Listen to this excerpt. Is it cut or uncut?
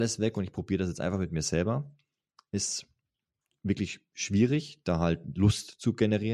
uncut